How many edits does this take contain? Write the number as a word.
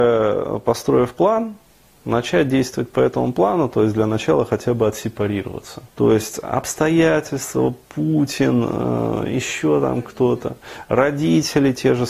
one